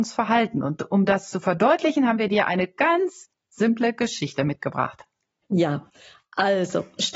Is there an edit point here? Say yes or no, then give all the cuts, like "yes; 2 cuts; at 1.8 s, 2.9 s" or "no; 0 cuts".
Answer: no; 0 cuts